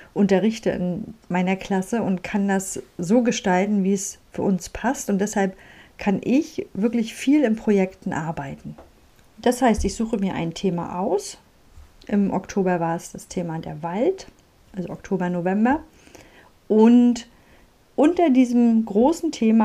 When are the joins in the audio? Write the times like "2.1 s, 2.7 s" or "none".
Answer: none